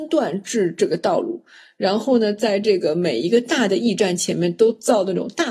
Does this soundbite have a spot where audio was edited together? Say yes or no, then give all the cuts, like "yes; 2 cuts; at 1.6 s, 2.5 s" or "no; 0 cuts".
no; 0 cuts